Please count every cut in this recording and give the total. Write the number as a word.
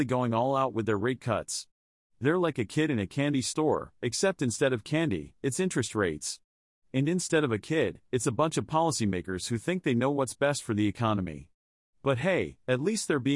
zero